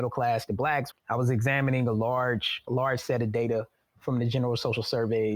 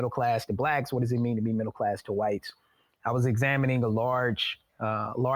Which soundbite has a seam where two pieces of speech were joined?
first; 2 cuts; at 0.9 s, 2.7 s

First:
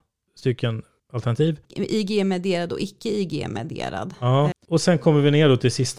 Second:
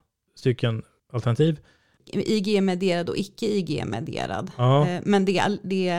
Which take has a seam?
first; 2 cuts; at 1.6 s, 4.5 s

